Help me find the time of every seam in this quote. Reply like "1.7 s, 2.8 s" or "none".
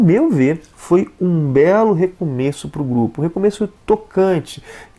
3.8 s